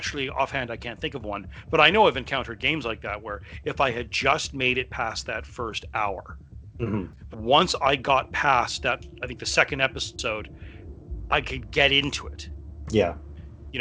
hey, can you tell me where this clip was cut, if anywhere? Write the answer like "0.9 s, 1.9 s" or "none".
7.3 s